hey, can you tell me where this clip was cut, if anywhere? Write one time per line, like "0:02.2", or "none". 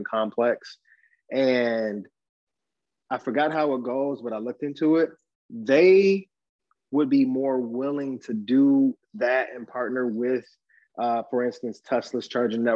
none